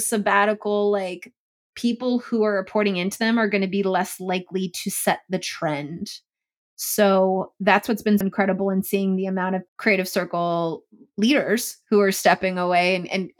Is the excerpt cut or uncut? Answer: cut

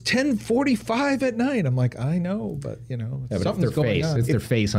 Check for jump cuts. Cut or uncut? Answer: uncut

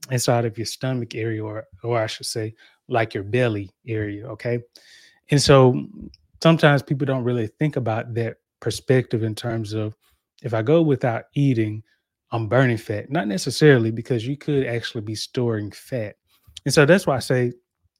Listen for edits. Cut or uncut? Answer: uncut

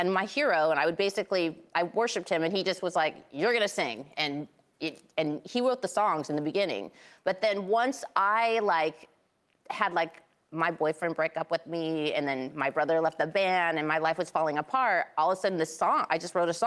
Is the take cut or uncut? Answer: uncut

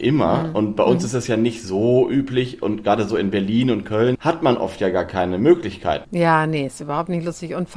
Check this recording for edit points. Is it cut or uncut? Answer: cut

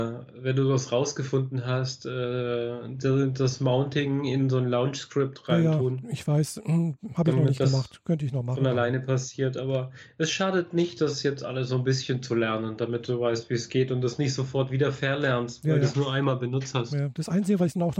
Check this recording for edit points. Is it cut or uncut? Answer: uncut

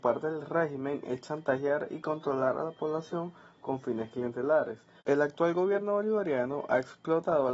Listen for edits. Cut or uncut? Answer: cut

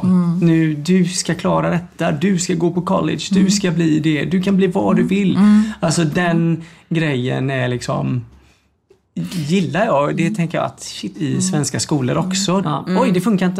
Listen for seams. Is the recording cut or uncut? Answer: cut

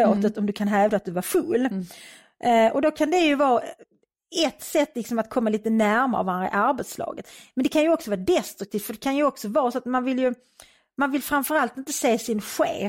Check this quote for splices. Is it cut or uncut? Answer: uncut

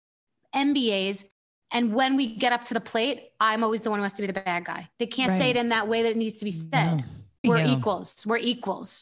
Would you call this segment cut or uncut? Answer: cut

